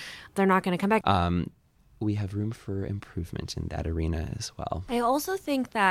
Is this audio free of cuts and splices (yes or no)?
no